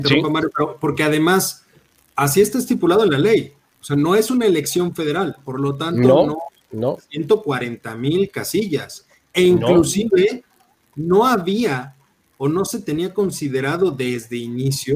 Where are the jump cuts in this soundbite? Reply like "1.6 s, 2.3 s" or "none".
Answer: 7.0 s